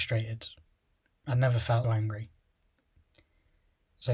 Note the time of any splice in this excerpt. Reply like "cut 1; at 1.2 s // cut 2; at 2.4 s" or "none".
cut 1; at 1.8 s